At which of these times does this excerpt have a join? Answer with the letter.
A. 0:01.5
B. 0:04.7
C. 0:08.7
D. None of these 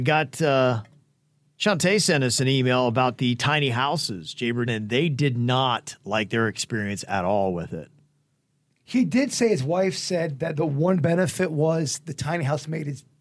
B